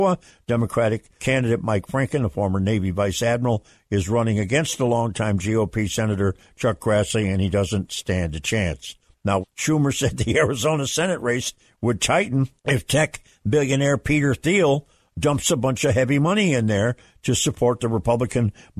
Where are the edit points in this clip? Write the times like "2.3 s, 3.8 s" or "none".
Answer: 1.2 s, 9.4 s, 12.6 s

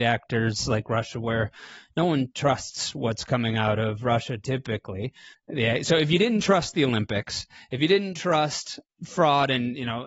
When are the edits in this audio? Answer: 5.3 s

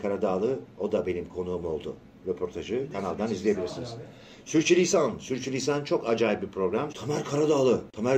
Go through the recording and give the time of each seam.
6.9 s

